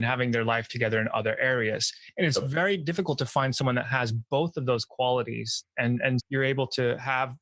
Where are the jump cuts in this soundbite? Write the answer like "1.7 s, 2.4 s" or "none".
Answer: 6.2 s